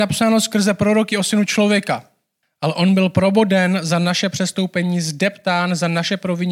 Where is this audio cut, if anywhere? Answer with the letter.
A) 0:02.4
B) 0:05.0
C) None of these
A